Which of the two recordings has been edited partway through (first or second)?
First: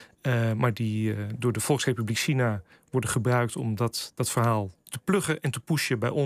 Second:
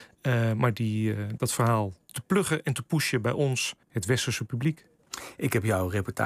second